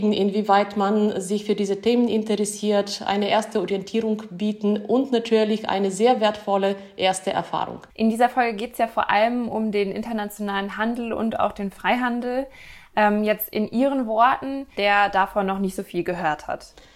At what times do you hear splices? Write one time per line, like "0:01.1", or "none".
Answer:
0:07.9
0:14.8